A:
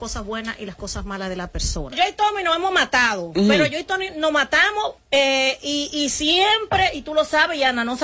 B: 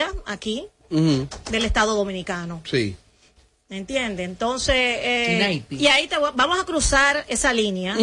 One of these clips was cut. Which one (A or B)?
A